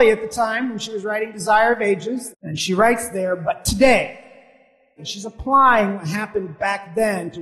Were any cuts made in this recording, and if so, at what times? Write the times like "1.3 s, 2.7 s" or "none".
2.3 s, 5.0 s